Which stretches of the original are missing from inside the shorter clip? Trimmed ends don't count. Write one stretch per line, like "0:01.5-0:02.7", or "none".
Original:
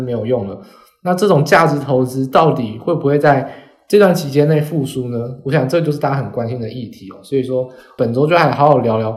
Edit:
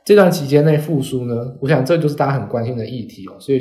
none